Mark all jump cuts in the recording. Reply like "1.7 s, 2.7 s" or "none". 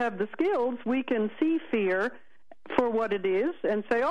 none